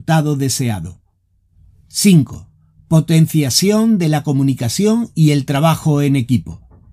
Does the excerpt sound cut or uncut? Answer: uncut